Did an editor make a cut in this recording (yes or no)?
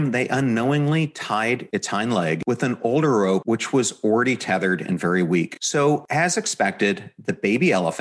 no